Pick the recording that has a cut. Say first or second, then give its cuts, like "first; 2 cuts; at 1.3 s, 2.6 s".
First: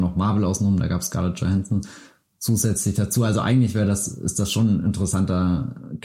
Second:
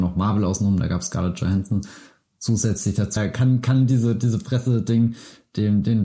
second; 1 cut; at 3.2 s